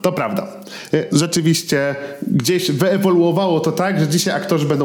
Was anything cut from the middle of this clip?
yes; 1 cut; at 1.1 s

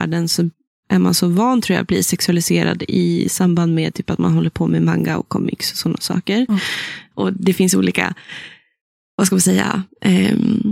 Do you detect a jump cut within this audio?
yes; 1 cut; at 7.1 s

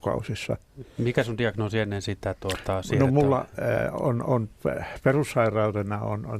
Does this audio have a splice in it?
no; 0 cuts

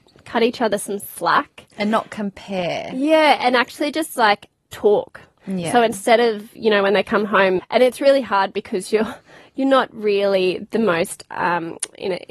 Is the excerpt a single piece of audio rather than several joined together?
no; 1 cut; at 7.6 s

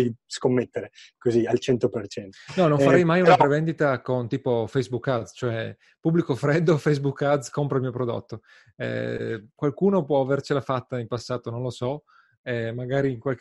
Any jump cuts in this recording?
no; 0 cuts

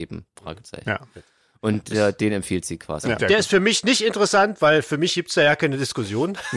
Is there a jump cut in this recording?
yes; 1 cut; at 3.2 s

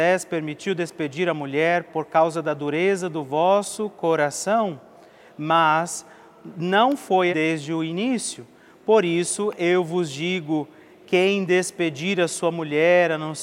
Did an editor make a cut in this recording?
yes; 1 cut; at 7.3 s

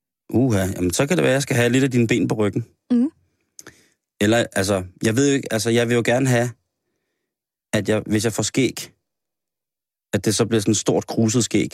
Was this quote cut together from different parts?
no; 0 cuts

